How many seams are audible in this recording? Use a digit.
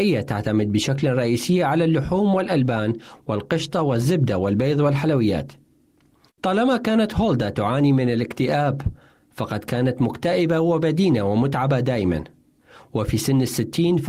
1